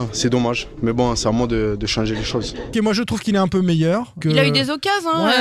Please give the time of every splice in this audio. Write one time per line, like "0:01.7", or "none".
0:02.7
0:04.2